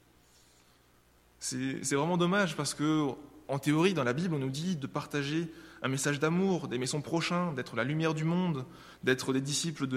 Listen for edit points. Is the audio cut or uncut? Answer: uncut